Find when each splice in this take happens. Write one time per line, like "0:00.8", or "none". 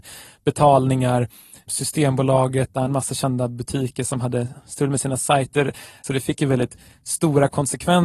0:02.7
0:06.0